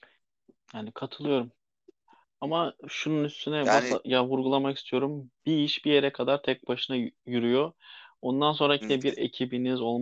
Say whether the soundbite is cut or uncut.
cut